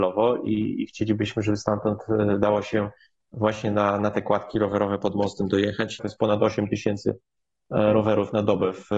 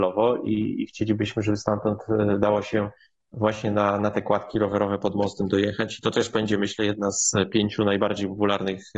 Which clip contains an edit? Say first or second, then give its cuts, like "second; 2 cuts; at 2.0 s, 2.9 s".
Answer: first; 1 cut; at 6.0 s